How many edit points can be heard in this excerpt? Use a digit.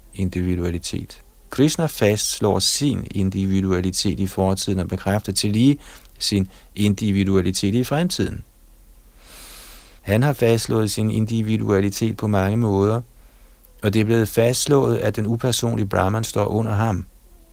0